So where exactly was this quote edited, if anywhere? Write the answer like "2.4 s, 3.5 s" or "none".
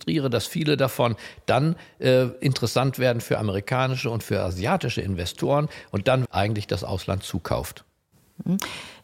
6.2 s

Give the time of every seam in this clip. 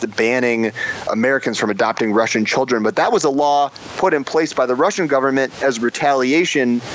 none

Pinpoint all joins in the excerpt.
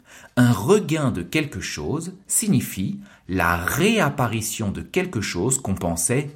none

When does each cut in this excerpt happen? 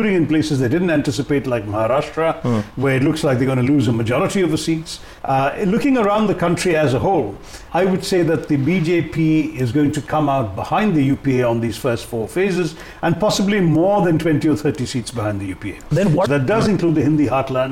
5.2 s, 7.7 s, 16.3 s

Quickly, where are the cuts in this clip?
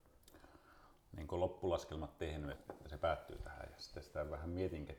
2.5 s

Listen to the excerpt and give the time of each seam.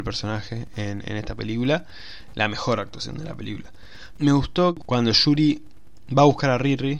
2.3 s, 4.2 s

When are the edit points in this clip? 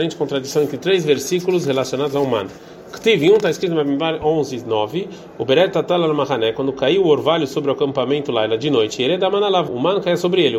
9.7 s

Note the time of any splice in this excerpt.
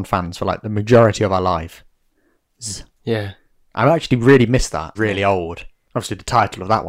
3.0 s, 5.0 s

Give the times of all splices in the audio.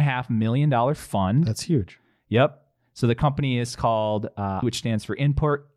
4.6 s

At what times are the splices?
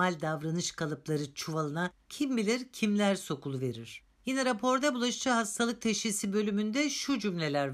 none

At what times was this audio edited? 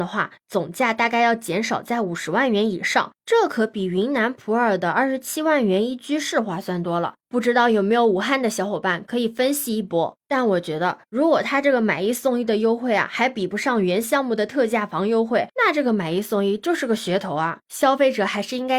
none

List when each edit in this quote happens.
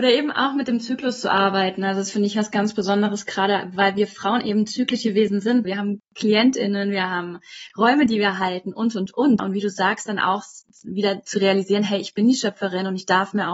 5.6 s, 9.4 s

